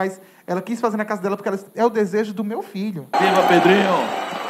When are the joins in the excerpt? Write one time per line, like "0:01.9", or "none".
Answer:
0:03.1